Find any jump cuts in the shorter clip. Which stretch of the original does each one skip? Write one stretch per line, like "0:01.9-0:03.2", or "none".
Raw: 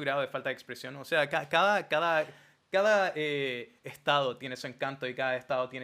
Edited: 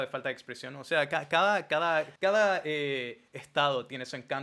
0:02.4-0:02.7